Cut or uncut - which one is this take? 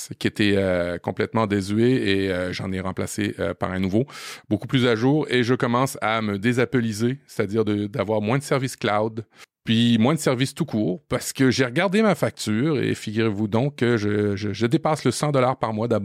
uncut